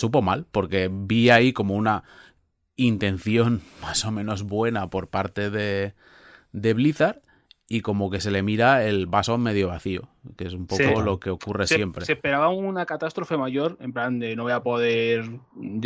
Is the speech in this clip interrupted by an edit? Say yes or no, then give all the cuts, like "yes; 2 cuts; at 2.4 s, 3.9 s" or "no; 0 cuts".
no; 0 cuts